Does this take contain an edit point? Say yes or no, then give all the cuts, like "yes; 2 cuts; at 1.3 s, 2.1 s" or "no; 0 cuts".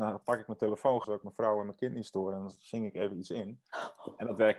yes; 1 cut; at 1.0 s